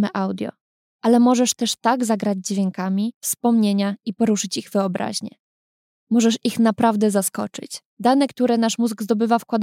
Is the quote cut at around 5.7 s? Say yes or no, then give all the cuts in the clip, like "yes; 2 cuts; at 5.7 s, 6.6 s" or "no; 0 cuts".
no; 2 cuts; at 3.2 s, 7.9 s